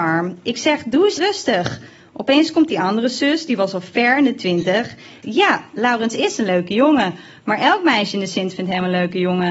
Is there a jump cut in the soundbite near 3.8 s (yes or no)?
no